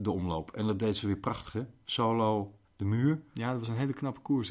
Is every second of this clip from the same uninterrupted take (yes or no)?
no